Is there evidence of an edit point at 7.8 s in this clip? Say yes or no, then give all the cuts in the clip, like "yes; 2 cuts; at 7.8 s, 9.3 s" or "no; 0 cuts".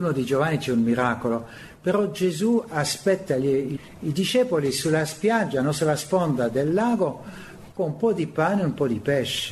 yes; 1 cut; at 7.8 s